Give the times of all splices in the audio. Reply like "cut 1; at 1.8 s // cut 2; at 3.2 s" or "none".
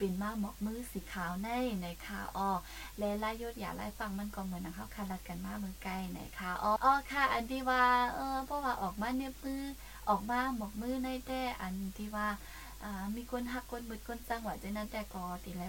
cut 1; at 6.8 s